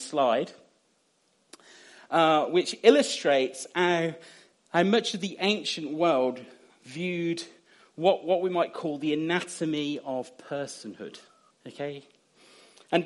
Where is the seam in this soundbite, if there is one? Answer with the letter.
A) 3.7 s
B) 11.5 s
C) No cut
B